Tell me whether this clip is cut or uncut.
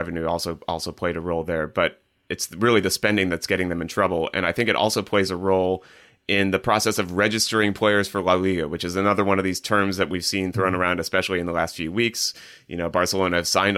uncut